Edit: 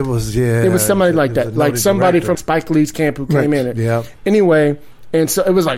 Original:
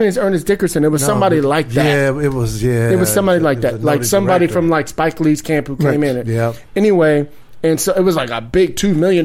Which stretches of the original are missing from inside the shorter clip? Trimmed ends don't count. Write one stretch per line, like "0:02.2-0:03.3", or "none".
0:04.6-0:04.8